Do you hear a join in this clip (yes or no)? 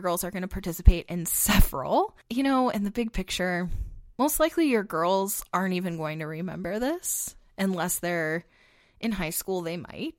yes